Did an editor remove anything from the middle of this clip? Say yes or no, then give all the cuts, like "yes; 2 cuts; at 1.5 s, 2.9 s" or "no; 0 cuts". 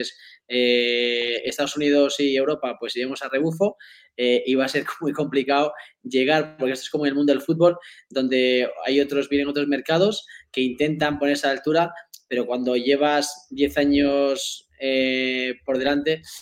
no; 0 cuts